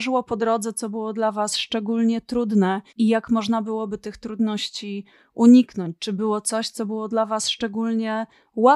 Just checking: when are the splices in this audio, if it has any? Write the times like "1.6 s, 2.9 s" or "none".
2.9 s